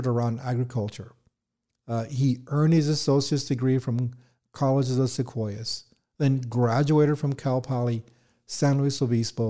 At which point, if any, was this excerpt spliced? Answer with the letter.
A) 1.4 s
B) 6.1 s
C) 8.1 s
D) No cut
D